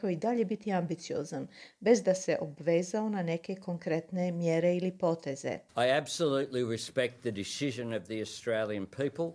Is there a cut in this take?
yes; 1 cut; at 5.7 s

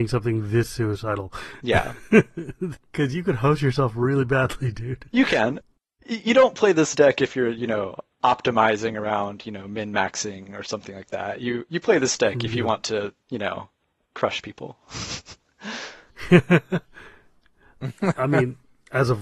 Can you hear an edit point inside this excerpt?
yes; 1 cut; at 13.2 s

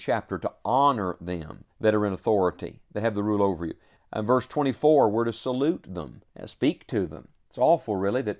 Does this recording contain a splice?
yes; 3 cuts; at 1.7 s, 4.0 s, 6.3 s

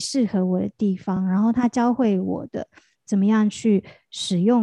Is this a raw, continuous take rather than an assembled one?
yes; 0 cuts

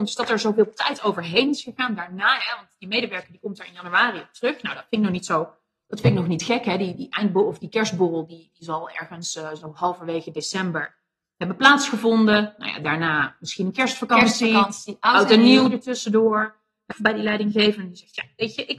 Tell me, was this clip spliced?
yes; 1 cut; at 16.9 s

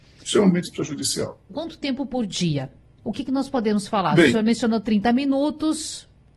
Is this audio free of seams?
no; 1 cut; at 1.5 s

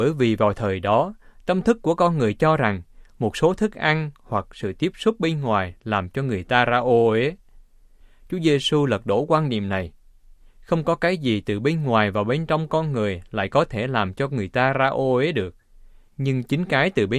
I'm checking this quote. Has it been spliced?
no; 0 cuts

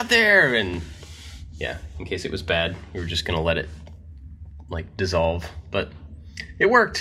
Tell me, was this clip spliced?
no; 0 cuts

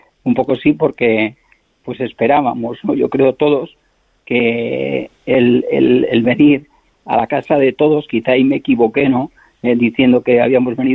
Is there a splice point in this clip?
no; 0 cuts

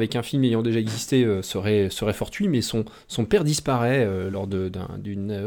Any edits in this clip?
no; 0 cuts

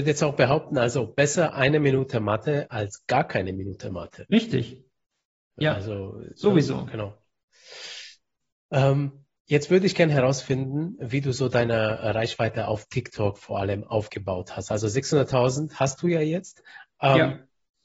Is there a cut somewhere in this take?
no; 0 cuts

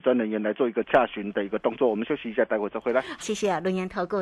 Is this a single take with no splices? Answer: no; 1 cut; at 3.2 s

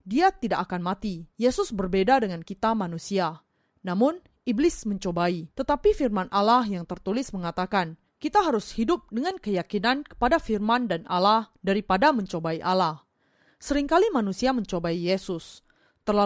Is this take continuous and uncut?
no; 3 cuts; at 1.3 s, 5.5 s, 8.1 s

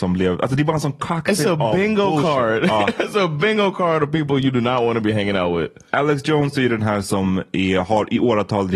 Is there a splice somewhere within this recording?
no; 0 cuts

